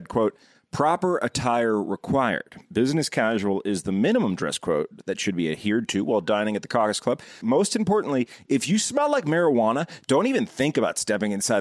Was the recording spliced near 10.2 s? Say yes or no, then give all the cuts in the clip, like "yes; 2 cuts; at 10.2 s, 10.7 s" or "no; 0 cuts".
no; 1 cut; at 7.4 s